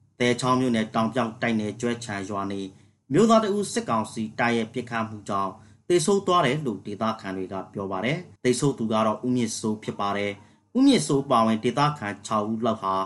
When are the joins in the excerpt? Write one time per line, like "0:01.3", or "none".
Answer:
0:08.4